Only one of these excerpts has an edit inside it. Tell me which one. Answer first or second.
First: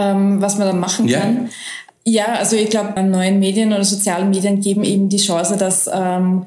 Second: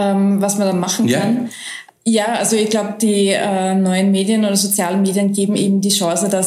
first